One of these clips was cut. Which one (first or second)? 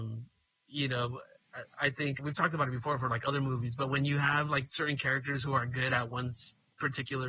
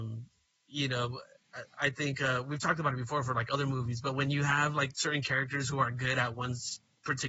first